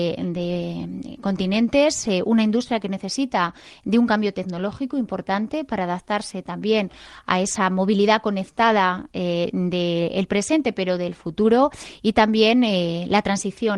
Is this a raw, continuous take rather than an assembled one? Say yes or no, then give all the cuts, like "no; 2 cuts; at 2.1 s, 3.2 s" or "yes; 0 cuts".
yes; 0 cuts